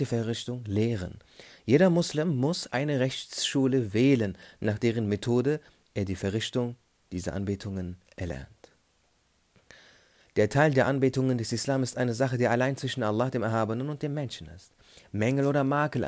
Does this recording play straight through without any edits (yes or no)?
yes